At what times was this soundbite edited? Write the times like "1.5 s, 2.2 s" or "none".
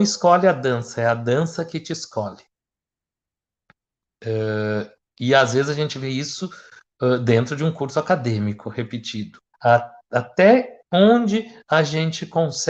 9.5 s, 10.8 s